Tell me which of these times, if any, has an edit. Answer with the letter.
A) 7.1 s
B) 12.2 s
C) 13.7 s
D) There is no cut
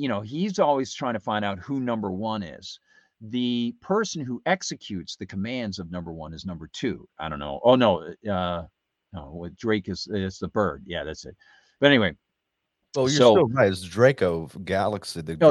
A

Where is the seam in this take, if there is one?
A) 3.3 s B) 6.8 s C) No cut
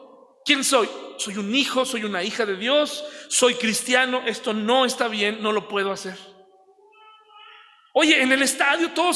C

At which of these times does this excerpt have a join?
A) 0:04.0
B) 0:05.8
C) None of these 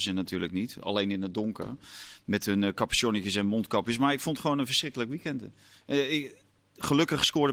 C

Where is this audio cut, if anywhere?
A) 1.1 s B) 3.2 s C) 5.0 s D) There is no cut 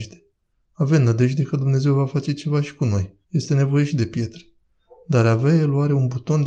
B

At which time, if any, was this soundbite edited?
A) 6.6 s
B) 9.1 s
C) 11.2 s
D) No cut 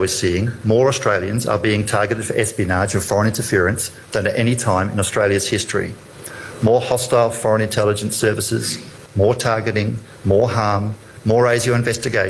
B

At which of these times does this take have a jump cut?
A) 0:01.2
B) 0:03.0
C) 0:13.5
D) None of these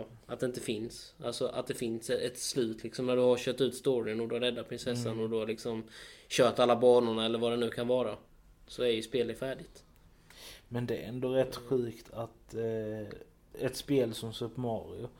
C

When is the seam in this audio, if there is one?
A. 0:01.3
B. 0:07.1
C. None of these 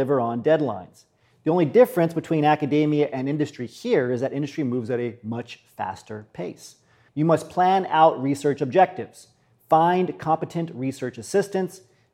B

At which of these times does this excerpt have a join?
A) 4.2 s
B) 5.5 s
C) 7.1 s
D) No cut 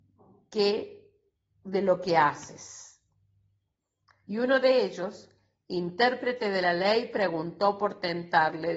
A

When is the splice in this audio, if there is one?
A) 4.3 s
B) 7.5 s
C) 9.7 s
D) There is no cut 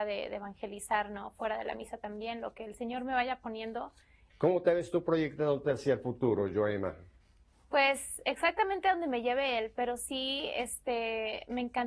A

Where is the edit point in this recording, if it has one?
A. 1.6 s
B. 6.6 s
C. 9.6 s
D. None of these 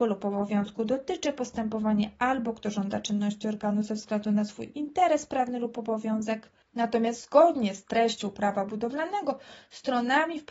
D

